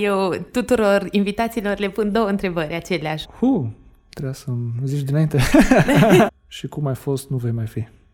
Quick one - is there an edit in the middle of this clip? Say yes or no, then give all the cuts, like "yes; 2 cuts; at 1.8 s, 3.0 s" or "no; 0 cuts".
yes; 2 cuts; at 3.2 s, 6.3 s